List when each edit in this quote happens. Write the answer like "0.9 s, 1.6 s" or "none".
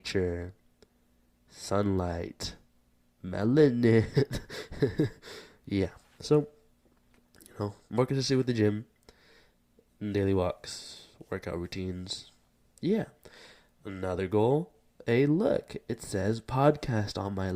none